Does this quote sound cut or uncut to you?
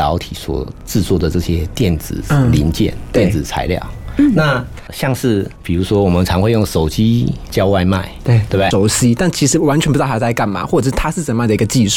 cut